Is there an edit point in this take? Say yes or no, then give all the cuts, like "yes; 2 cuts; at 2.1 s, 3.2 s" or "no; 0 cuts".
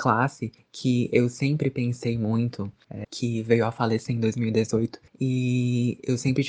yes; 1 cut; at 3.0 s